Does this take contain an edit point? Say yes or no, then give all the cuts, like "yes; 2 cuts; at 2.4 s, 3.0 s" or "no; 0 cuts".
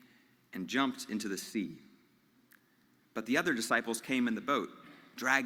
no; 0 cuts